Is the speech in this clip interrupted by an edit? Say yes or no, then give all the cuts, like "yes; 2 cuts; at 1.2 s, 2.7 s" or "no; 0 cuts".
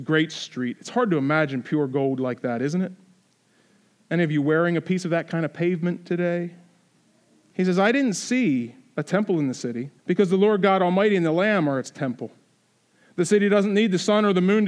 yes; 2 cuts; at 7.5 s, 10.0 s